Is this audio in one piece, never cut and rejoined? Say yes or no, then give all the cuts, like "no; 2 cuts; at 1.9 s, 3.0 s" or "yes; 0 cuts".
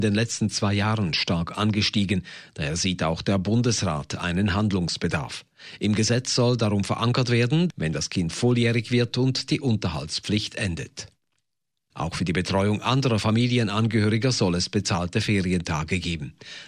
no; 2 cuts; at 7.7 s, 11.9 s